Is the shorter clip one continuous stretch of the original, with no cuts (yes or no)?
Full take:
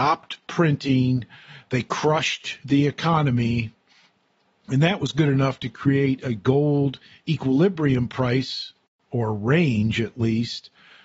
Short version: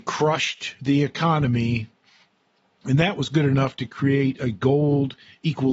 yes